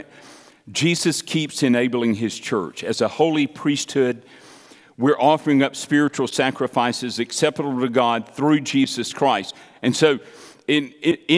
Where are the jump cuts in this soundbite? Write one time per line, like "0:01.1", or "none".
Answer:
none